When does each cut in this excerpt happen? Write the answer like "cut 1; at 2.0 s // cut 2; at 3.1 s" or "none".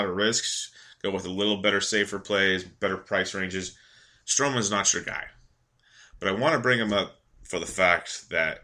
none